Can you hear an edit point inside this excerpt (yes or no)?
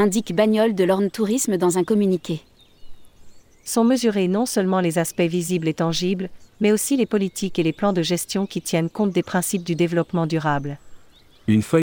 yes